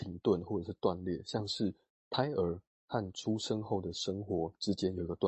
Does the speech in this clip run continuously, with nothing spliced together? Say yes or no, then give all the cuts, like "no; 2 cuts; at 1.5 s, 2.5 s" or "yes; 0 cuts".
yes; 0 cuts